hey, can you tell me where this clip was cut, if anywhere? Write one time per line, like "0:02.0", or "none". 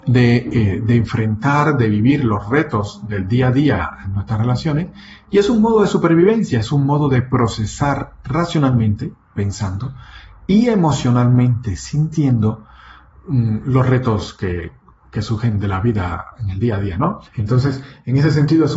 0:17.3